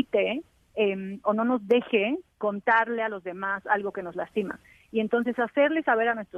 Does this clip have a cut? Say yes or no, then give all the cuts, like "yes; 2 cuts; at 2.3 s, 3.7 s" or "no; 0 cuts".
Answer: yes; 1 cut; at 2.3 s